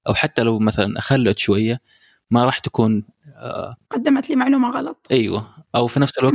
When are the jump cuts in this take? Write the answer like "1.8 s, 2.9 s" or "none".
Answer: 3.8 s